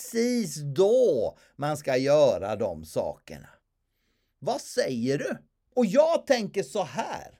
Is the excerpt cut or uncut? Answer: cut